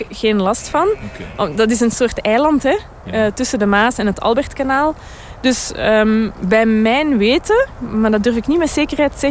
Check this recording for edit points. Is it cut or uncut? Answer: uncut